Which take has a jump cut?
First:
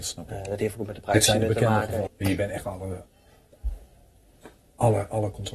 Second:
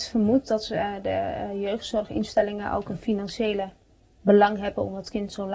first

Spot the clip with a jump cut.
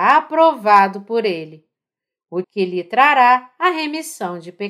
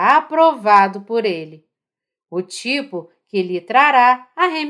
first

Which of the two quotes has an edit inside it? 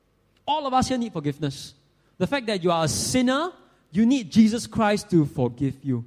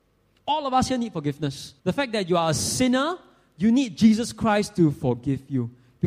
second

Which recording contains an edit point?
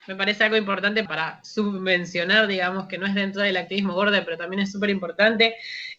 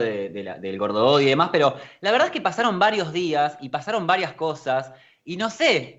first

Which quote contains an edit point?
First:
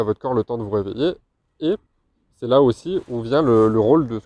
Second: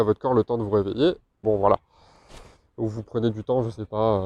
second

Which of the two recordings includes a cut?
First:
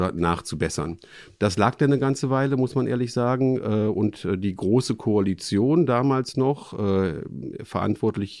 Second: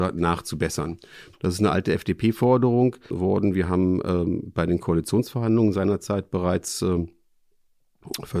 second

